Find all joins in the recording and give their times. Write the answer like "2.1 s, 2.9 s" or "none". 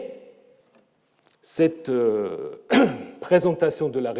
none